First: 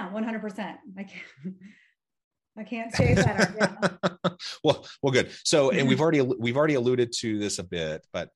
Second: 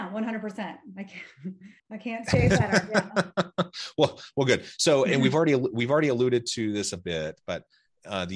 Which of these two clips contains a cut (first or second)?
second